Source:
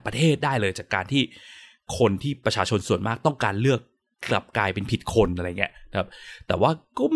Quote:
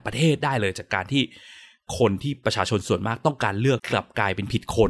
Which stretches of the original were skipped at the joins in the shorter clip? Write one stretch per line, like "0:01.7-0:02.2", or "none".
0:03.8-0:04.2